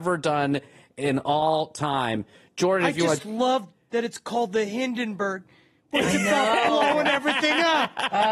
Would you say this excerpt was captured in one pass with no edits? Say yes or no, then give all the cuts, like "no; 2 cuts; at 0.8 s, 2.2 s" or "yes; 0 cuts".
yes; 0 cuts